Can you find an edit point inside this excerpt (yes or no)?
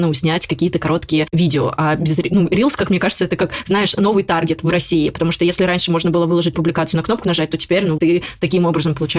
yes